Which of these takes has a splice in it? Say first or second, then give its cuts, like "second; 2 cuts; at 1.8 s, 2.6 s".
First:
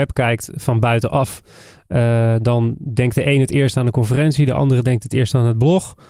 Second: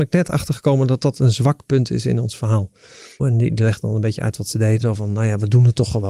second; 2 cuts; at 3.2 s, 4.8 s